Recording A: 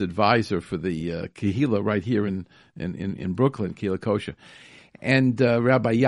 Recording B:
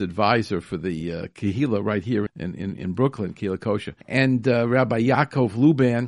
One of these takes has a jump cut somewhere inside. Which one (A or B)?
B